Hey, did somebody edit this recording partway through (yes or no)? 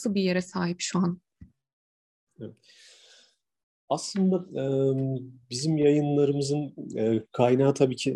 no